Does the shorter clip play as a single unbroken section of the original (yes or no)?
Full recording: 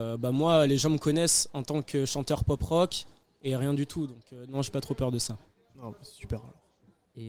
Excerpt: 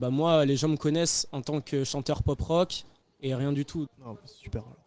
no